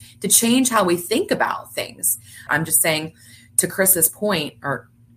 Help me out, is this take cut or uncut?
cut